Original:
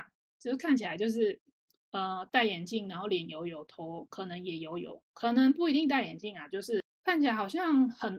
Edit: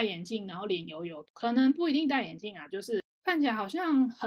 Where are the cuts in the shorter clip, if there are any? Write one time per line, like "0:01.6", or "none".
0:01.2